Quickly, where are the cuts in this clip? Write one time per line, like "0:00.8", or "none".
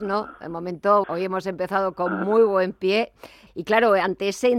0:01.0
0:03.5